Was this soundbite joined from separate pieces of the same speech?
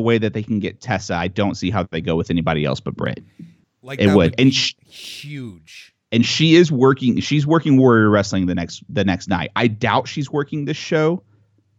yes; 1 cut; at 3.6 s

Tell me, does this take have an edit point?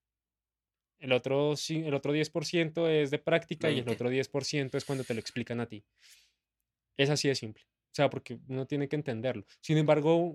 no; 0 cuts

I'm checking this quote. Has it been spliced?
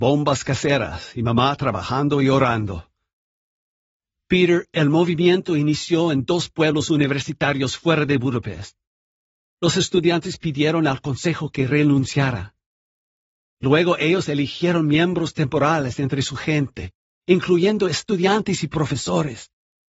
no; 0 cuts

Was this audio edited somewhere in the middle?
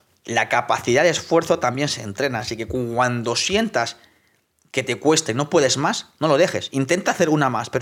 no; 0 cuts

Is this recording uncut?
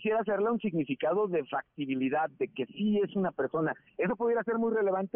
yes; 0 cuts

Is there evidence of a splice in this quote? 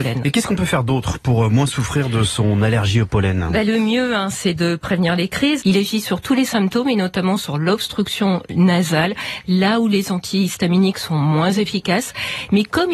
yes; 1 cut; at 5.6 s

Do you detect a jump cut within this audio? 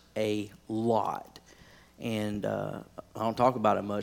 no; 0 cuts

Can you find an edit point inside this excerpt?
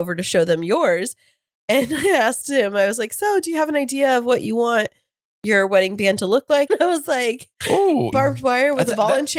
yes; 2 cuts; at 6.7 s, 8.1 s

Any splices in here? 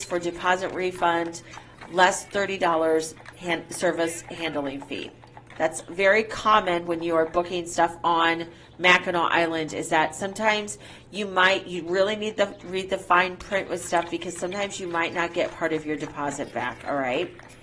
no; 0 cuts

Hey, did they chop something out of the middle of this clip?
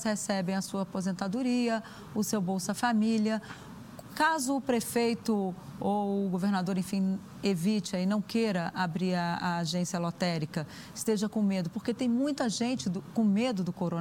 no; 0 cuts

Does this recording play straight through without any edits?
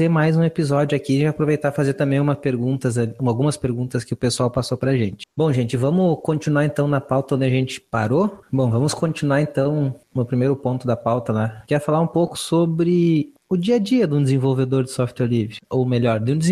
no; 2 cuts; at 8.7 s, 11.7 s

